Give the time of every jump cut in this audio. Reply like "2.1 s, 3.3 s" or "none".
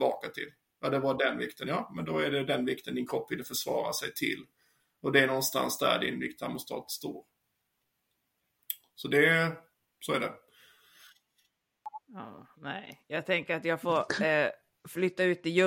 none